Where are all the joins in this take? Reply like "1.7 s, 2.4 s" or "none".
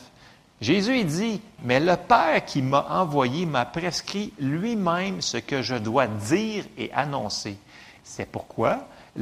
1.6 s, 8.0 s